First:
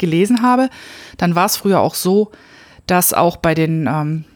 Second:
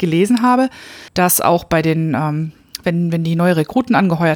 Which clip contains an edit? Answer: second; 2 cuts; at 1.1 s, 2.8 s

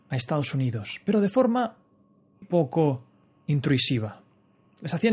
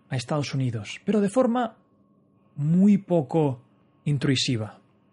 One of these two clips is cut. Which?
first; 1 cut; at 2.4 s

